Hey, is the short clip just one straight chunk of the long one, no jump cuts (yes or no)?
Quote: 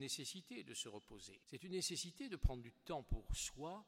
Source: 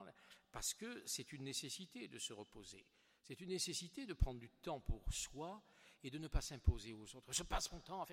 no